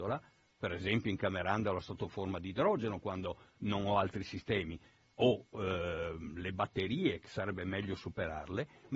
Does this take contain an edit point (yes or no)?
no